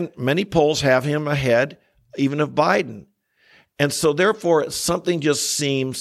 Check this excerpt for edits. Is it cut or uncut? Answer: uncut